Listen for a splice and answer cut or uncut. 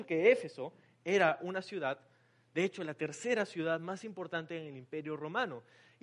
uncut